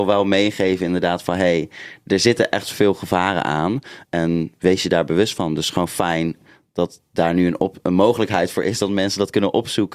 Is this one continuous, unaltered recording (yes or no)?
yes